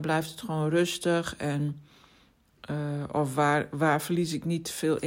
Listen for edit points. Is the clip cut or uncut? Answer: uncut